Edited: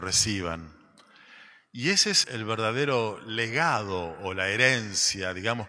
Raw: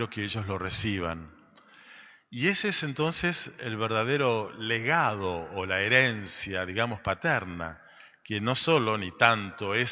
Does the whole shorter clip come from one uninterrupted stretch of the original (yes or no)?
no